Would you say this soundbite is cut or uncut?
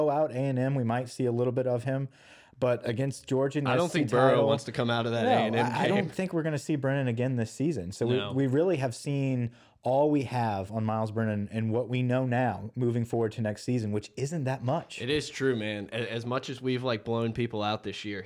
uncut